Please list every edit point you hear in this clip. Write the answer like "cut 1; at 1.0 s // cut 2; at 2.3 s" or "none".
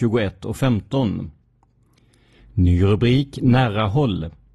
cut 1; at 2.4 s